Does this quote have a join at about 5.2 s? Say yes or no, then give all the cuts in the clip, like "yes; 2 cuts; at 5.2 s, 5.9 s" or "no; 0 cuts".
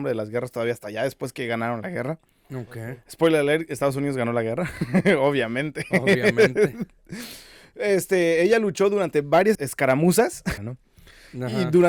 no; 2 cuts; at 9.5 s, 10.6 s